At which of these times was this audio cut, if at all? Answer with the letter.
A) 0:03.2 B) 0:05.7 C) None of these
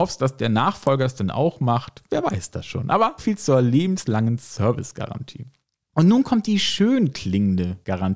A